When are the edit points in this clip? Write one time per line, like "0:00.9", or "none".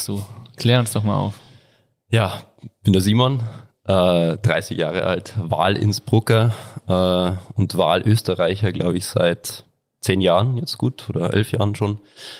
none

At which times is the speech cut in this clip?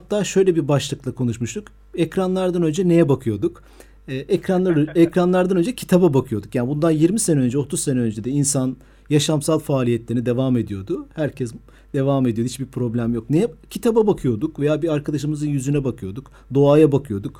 none

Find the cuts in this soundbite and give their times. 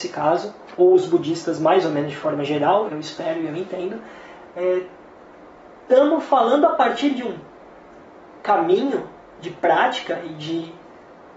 0:02.9

